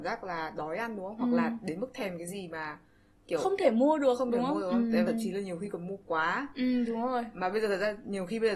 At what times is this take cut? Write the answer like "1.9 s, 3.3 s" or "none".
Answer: 5.1 s